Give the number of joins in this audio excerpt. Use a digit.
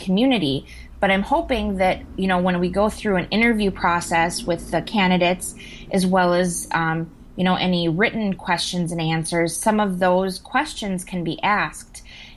0